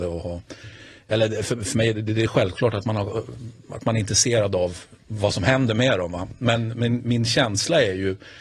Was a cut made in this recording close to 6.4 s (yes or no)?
no